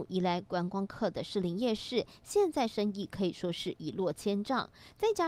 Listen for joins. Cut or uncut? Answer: uncut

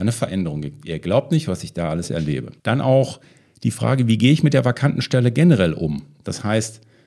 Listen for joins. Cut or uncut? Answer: cut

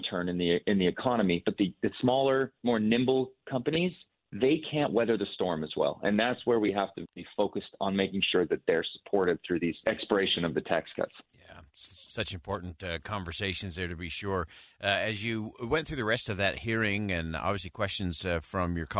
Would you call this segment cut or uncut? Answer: uncut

